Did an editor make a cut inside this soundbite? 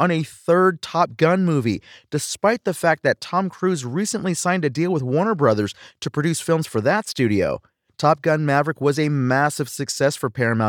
yes; 1 cut; at 7.9 s

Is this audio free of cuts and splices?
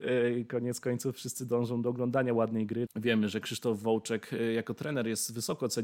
no; 1 cut; at 2.9 s

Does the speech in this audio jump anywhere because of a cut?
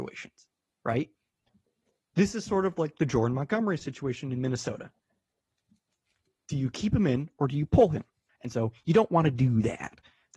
yes; 1 cut; at 8.3 s

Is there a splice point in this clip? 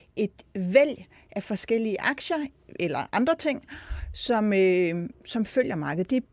no; 0 cuts

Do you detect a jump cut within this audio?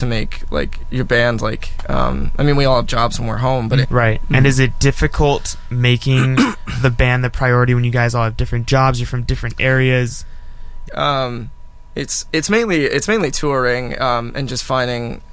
yes; 2 cuts; at 3.8 s, 10.9 s

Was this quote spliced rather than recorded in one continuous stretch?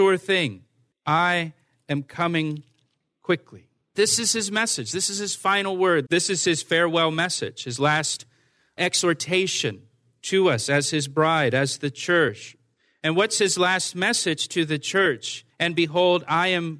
yes; 2 cuts; at 6.1 s, 15.5 s

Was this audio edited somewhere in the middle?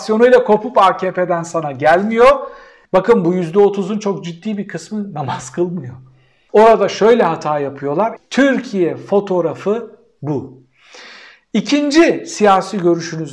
yes; 3 cuts; at 2.9 s, 6.5 s, 8.2 s

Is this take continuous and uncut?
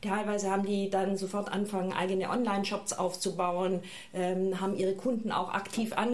yes; 0 cuts

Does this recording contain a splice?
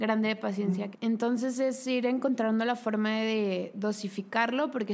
yes; 1 cut; at 0.9 s

